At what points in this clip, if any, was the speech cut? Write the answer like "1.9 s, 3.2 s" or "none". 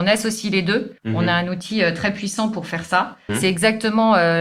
1.0 s, 3.3 s